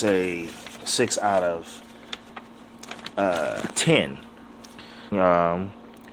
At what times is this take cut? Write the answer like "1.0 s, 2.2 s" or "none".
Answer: 5.1 s